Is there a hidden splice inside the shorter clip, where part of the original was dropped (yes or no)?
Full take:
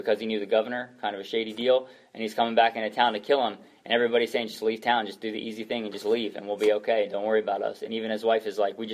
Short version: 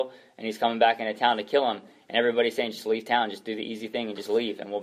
no